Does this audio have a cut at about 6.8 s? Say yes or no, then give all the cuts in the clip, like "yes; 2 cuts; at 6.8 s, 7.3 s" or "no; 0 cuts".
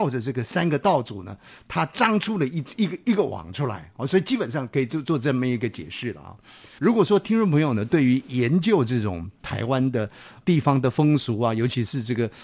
yes; 1 cut; at 6.8 s